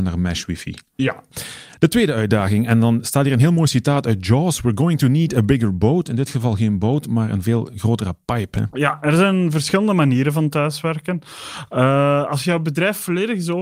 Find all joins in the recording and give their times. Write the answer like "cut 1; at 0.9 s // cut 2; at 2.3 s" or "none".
none